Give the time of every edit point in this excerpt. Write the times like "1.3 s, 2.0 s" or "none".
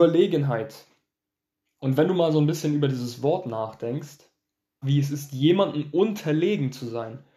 4.8 s